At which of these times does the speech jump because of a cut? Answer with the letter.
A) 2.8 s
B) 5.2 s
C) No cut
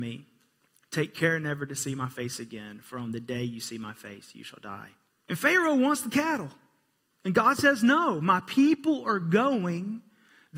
B